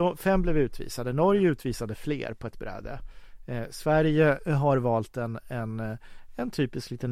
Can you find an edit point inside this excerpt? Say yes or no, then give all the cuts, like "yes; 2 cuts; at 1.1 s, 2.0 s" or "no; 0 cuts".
no; 0 cuts